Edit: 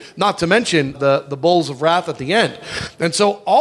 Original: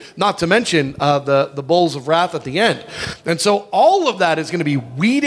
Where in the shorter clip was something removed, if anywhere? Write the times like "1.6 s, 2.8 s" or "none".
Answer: 1.0 s